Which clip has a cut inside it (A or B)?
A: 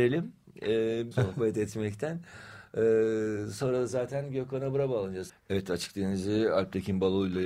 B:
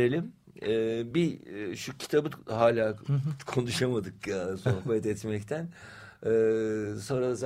A